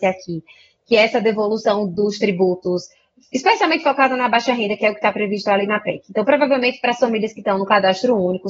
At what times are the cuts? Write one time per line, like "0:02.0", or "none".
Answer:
none